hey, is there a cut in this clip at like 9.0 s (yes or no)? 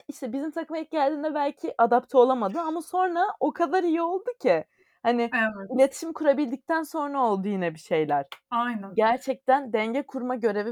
no